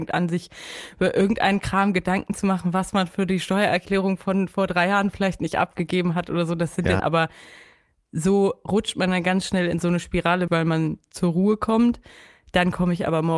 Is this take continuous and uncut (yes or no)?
no